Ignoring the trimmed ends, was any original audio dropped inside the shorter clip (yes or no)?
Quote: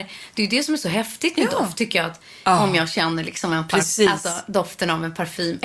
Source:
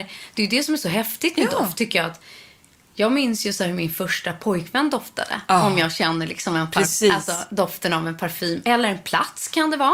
yes